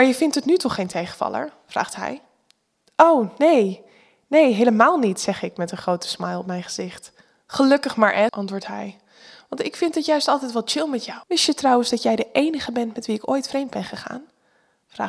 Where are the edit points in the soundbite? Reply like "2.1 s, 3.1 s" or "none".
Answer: 8.3 s, 11.2 s